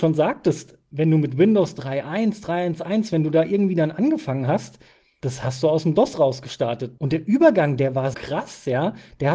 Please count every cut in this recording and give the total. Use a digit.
2